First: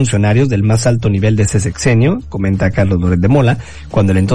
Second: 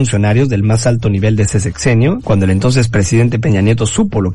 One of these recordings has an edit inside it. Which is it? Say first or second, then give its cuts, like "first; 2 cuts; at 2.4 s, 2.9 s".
second; 1 cut; at 2.2 s